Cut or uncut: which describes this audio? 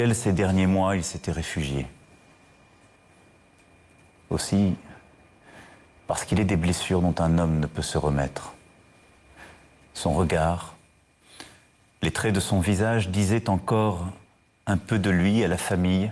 uncut